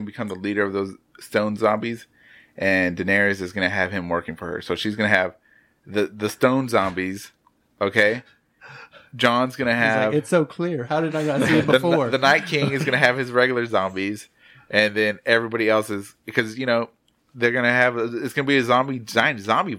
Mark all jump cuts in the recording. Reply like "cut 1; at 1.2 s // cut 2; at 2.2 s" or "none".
none